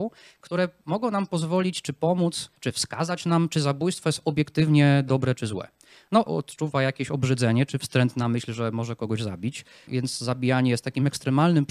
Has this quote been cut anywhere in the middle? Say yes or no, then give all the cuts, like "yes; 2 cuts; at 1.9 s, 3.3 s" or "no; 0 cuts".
yes; 2 cuts; at 6.3 s, 9.9 s